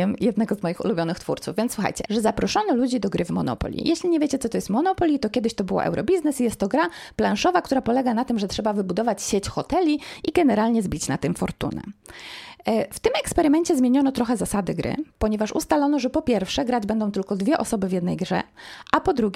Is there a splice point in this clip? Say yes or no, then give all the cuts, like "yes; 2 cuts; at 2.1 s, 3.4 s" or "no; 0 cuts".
yes; 1 cut; at 2.1 s